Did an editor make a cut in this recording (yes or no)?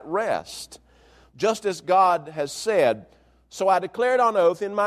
no